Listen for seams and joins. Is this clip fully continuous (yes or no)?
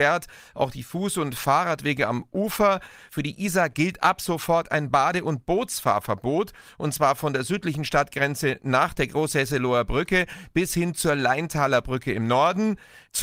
yes